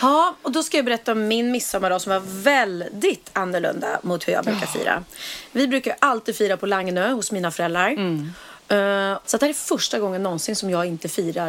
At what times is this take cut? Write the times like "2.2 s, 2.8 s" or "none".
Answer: 9.2 s